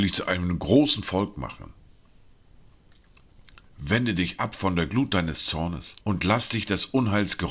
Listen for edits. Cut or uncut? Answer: cut